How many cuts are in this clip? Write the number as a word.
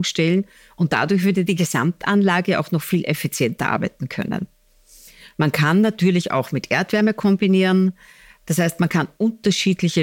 zero